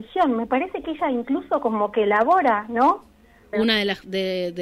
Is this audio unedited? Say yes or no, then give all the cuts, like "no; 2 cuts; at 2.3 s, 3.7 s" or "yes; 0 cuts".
no; 1 cut; at 3.5 s